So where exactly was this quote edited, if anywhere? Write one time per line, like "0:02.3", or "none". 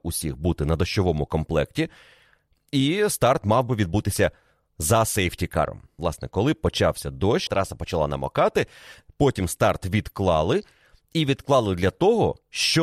0:06.0
0:07.5

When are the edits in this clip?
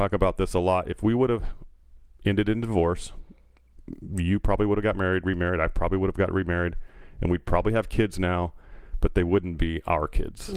none

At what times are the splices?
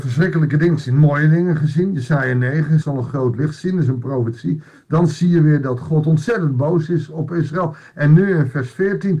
0:02.8

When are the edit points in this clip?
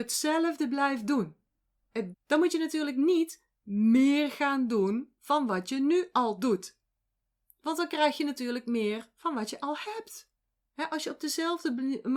0:02.1

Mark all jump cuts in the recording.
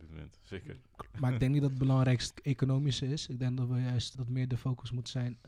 0:02.3
0:04.1

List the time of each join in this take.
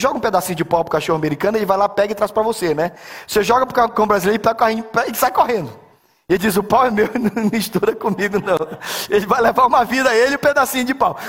none

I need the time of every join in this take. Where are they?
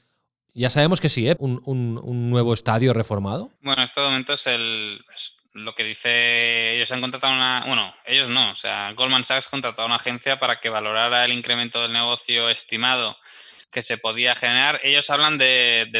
0:01.4
0:03.6

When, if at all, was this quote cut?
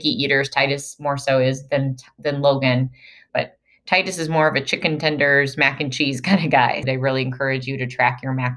0:03.3
0:06.8

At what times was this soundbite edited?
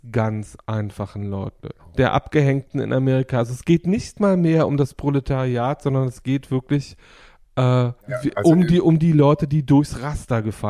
0:01.8
0:08.0

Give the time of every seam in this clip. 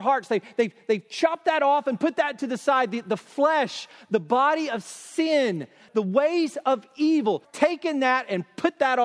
0:05.9
0:07.4

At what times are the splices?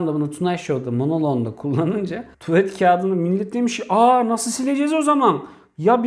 0:02.3

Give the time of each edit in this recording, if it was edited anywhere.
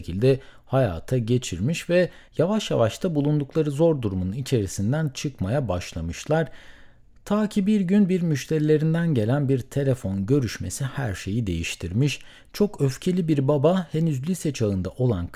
none

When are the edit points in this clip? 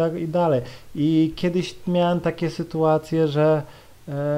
none

